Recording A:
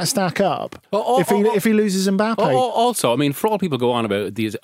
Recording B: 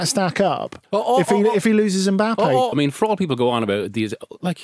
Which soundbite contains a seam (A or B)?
B